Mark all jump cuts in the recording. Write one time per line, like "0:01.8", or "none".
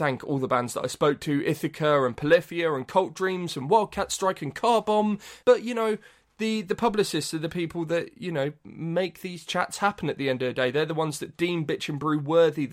0:05.4